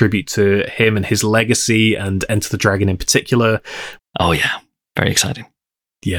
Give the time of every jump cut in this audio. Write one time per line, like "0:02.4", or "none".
0:04.0